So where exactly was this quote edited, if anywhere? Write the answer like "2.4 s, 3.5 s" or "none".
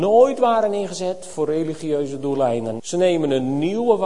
2.8 s